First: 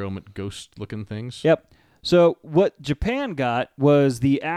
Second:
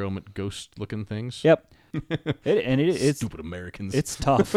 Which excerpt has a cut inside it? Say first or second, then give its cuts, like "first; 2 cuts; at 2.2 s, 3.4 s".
second; 1 cut; at 1.9 s